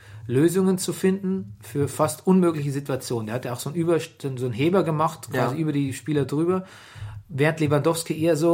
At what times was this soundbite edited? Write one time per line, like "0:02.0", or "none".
none

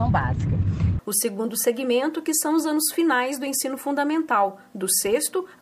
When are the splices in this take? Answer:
0:01.0

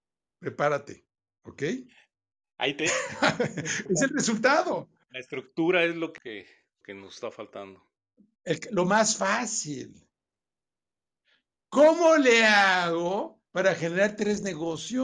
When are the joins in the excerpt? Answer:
0:13.5

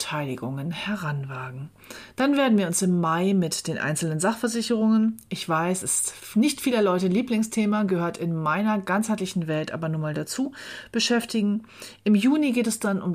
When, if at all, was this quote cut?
0:02.1

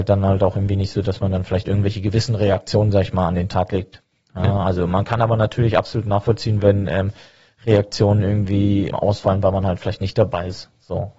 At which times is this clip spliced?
none

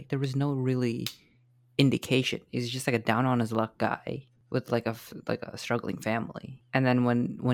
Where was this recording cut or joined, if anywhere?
none

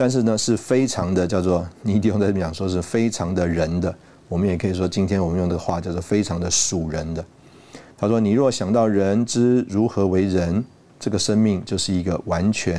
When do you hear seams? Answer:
0:07.9

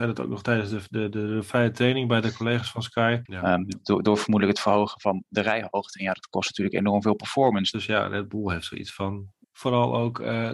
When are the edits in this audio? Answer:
0:03.3
0:07.7

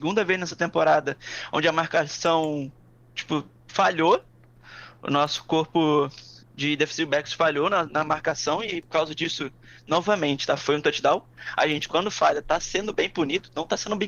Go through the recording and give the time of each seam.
none

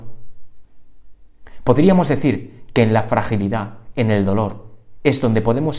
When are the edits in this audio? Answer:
none

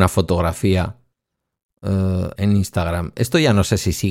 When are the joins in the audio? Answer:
0:02.4

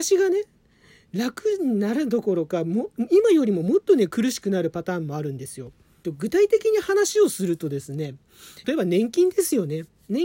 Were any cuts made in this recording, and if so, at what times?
0:06.0
0:08.6

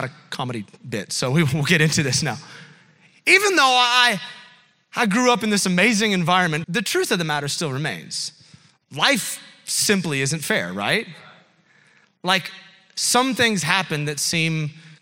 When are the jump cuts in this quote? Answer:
0:06.6

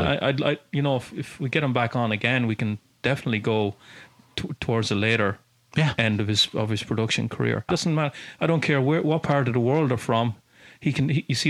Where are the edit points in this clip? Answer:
0:07.7

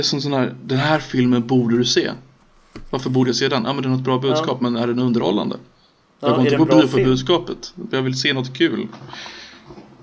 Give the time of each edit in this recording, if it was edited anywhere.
none

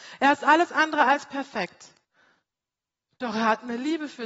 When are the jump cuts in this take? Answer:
none

